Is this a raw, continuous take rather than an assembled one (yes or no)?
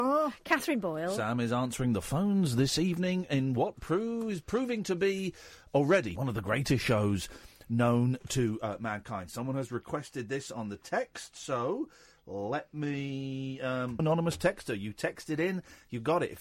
no